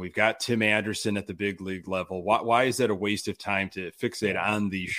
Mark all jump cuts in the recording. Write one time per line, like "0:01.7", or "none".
none